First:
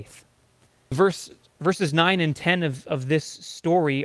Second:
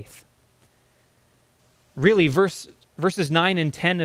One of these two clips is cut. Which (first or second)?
first